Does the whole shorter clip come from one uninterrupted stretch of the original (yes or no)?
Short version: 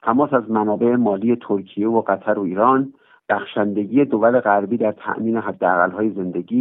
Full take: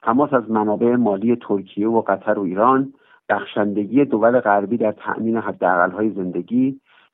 yes